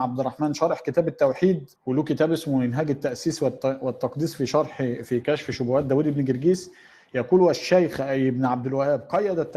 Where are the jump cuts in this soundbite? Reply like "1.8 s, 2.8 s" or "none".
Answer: 1.8 s